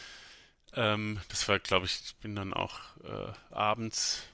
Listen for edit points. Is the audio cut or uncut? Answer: cut